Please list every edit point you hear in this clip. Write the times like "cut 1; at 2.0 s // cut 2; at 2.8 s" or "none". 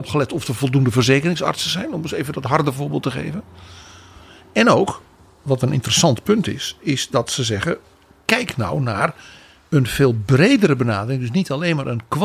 none